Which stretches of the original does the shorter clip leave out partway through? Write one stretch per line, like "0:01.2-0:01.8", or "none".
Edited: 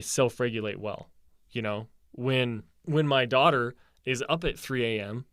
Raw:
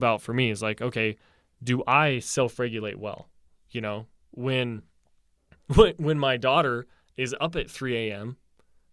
0:05.0-0:06.0